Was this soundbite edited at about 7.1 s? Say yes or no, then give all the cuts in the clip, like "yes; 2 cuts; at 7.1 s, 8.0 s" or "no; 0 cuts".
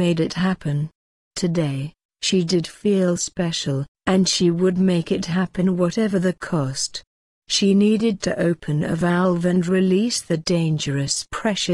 no; 1 cut; at 2.1 s